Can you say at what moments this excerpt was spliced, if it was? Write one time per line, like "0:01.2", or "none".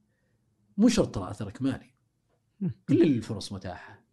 0:02.9